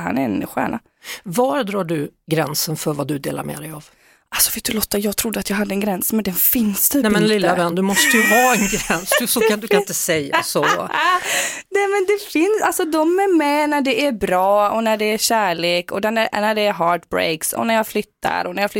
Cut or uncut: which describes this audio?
uncut